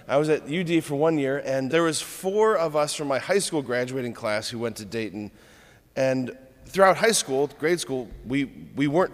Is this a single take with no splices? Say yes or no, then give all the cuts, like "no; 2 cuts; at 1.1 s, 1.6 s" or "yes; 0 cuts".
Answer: no; 1 cut; at 1.7 s